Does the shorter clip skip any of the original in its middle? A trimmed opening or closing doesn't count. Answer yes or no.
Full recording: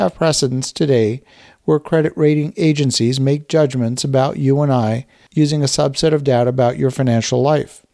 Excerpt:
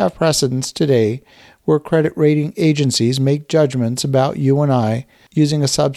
no